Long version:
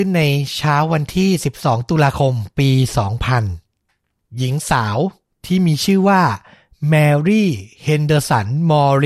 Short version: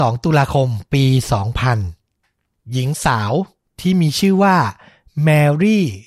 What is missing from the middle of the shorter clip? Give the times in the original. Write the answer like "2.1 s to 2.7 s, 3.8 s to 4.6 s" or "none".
none